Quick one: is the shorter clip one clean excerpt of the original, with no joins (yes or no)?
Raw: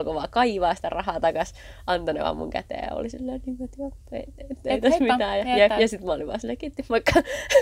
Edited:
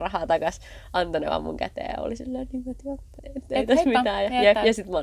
no